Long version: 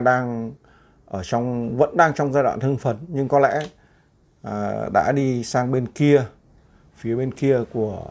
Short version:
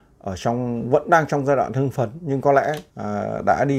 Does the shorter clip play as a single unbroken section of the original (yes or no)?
no